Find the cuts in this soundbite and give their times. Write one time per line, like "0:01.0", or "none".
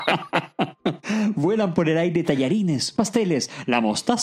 0:02.9